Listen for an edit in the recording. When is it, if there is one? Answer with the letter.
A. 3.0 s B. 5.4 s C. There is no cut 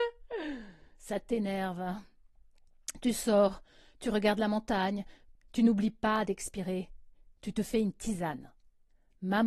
B